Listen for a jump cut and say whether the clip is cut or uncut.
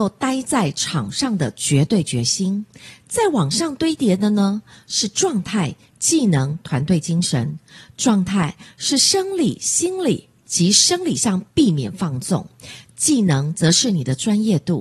uncut